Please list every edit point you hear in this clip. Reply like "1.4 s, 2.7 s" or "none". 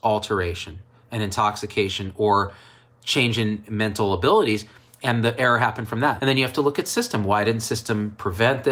6.2 s